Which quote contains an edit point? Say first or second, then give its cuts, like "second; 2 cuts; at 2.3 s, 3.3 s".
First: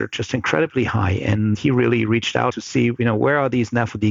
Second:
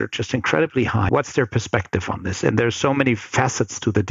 second; 1 cut; at 1.1 s